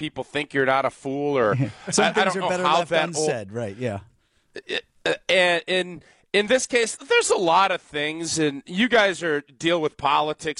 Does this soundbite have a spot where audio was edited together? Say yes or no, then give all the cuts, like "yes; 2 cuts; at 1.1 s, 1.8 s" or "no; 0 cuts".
no; 0 cuts